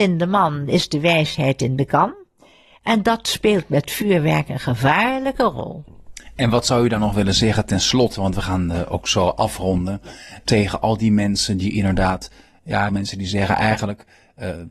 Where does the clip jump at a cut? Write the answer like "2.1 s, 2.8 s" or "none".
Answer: 10.5 s, 12.9 s